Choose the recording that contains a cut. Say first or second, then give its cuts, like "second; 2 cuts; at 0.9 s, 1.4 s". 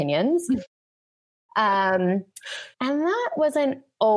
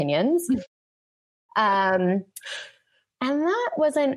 first; 1 cut; at 2.7 s